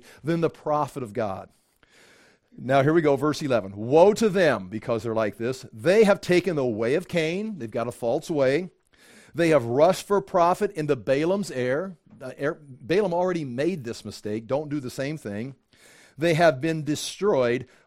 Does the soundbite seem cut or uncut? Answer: uncut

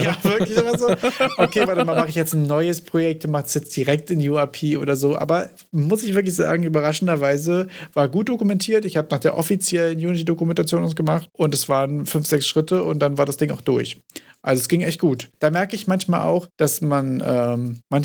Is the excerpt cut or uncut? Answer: uncut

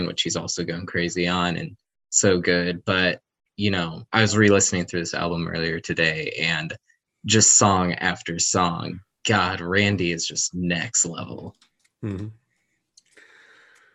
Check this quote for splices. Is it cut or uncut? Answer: cut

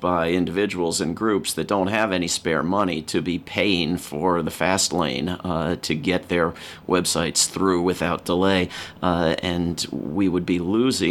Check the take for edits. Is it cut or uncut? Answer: uncut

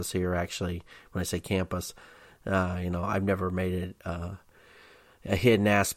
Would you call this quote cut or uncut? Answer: uncut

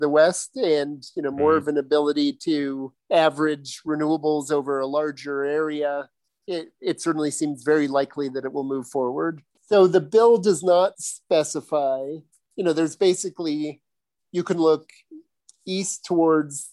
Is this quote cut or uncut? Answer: cut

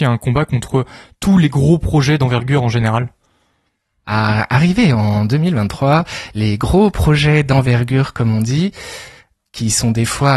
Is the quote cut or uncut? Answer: uncut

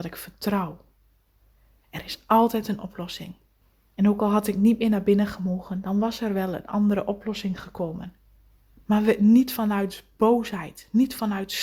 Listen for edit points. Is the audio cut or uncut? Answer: uncut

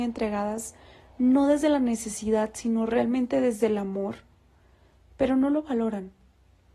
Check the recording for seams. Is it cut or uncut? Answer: uncut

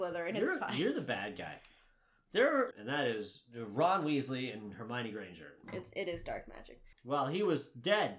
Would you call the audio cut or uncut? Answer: cut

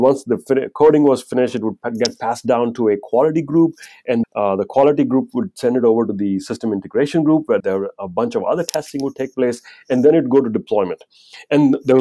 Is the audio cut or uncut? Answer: cut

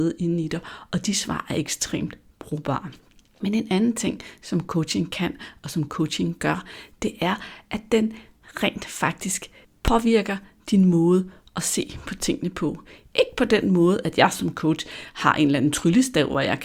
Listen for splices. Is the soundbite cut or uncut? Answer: uncut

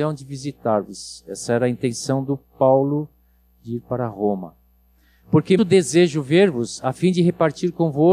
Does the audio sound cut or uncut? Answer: cut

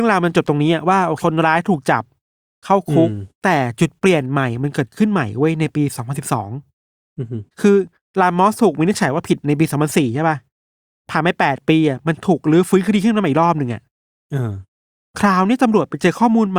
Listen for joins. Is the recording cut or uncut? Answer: cut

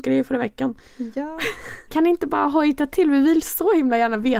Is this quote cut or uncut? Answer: cut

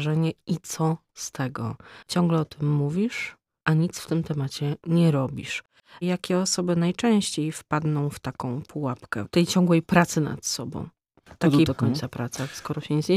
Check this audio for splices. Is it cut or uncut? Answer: cut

